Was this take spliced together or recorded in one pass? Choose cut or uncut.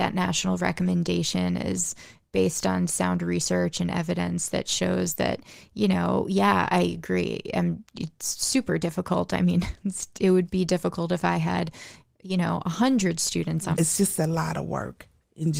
cut